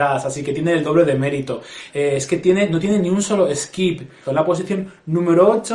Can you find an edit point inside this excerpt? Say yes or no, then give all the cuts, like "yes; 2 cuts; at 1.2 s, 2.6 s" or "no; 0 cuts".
yes; 2 cuts; at 1.9 s, 4.2 s